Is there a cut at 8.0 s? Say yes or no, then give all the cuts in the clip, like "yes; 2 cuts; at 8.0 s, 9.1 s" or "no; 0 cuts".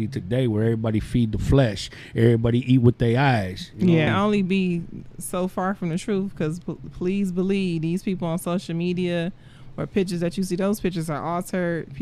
no; 1 cut; at 4.1 s